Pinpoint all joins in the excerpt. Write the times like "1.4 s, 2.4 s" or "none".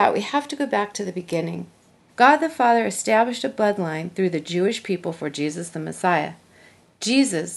2.1 s